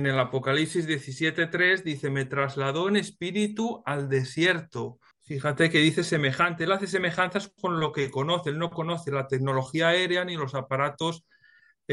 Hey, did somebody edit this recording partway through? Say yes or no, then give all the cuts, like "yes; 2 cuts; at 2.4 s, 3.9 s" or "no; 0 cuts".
yes; 1 cut; at 5.1 s